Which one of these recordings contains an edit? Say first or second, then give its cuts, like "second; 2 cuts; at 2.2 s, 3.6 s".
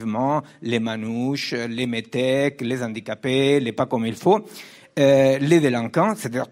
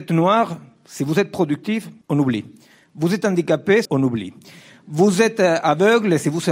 second; 2 cuts; at 2.0 s, 3.9 s